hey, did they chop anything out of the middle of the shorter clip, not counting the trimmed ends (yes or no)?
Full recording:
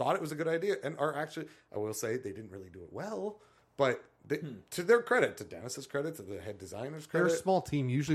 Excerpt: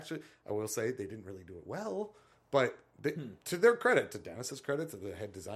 no